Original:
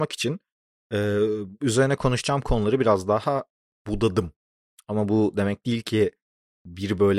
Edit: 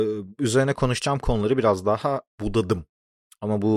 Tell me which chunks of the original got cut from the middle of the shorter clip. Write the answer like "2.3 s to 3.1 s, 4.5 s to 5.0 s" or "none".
3.5 s to 3.7 s